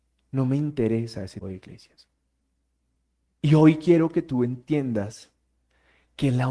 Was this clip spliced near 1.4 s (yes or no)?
yes